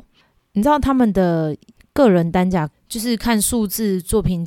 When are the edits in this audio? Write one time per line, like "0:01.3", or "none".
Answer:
0:02.7